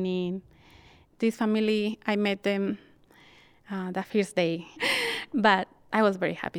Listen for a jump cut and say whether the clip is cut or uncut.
cut